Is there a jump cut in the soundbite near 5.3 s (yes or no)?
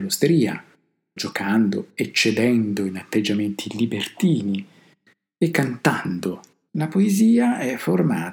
no